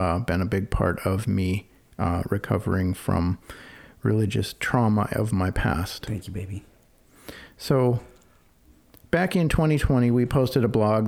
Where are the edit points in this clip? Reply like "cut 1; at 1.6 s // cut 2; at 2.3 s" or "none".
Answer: none